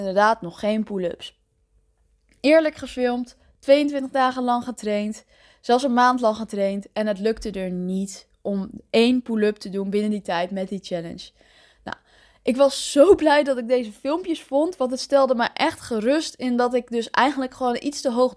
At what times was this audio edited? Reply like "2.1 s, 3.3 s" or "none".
none